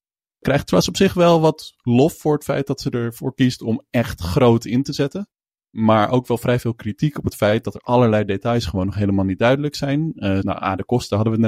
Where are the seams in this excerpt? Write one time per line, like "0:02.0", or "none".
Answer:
0:10.4